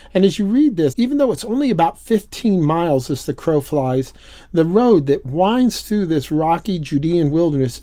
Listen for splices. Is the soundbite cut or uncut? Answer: cut